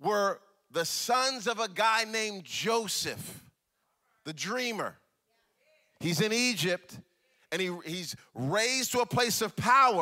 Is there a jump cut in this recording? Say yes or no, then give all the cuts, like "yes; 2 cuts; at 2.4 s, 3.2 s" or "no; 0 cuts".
no; 0 cuts